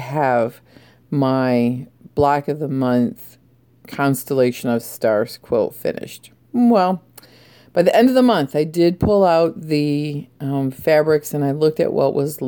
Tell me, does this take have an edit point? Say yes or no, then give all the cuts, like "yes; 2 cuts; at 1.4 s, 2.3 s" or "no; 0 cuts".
no; 0 cuts